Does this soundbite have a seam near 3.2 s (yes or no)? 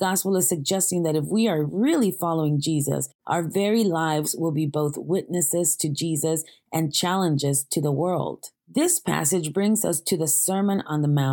yes